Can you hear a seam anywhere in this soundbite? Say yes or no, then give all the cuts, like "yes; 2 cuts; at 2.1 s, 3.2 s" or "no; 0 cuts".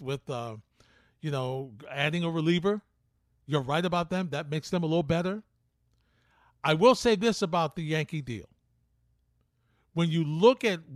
no; 0 cuts